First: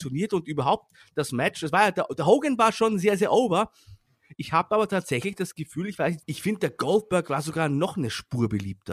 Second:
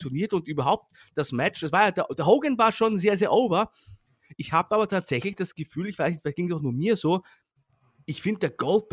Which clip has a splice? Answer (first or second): first